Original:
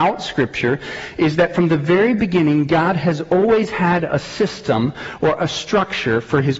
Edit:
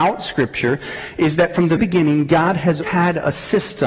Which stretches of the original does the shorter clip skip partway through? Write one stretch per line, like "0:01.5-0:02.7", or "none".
0:01.8-0:02.2
0:03.2-0:03.7